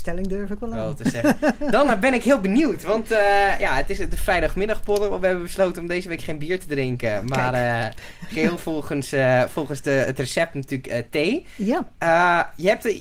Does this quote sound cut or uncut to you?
uncut